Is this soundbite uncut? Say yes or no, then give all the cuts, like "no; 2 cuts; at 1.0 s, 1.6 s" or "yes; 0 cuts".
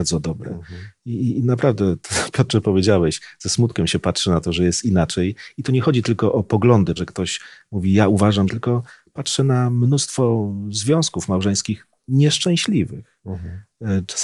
no; 2 cuts; at 7.0 s, 8.5 s